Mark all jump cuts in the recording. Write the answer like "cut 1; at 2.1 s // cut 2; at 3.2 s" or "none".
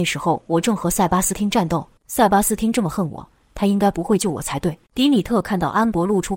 cut 1; at 2.0 s // cut 2; at 4.9 s